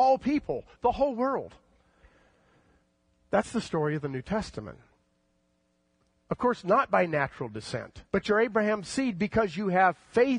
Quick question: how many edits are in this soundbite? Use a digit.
2